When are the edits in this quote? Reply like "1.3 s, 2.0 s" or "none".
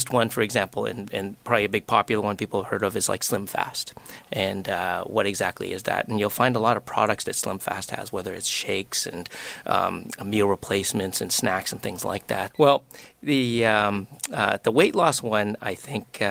12.5 s